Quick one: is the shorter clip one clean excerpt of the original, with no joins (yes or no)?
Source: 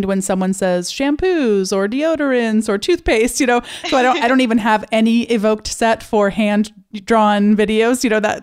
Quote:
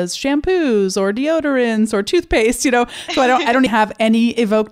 no